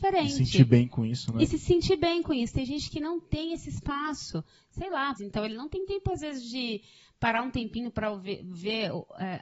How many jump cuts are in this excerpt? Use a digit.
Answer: 1